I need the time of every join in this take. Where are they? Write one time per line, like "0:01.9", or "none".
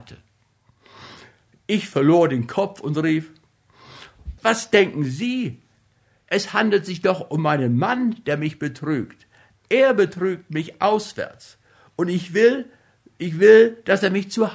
0:04.4

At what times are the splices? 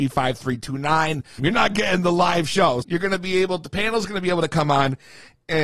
0:01.4
0:02.8

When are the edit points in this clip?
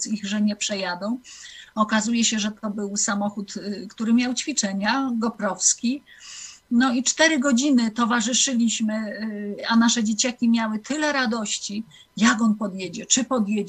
none

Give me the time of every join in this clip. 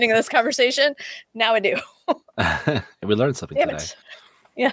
none

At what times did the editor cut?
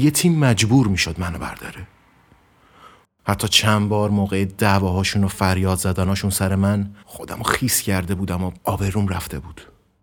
0:03.0
0:07.0
0:08.6

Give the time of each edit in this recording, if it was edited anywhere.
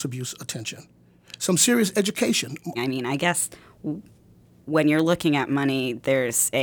0:02.7

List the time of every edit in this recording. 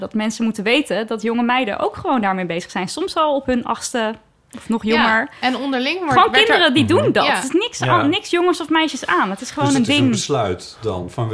none

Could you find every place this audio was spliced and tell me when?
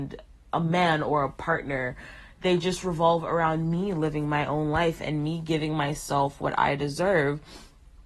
none

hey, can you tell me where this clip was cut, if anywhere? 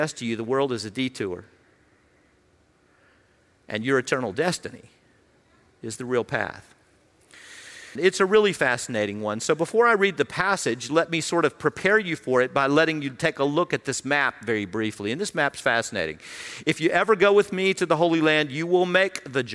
0:07.9

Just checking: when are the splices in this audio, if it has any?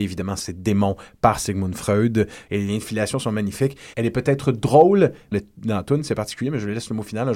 0:02.5
0:03.9
0:05.3

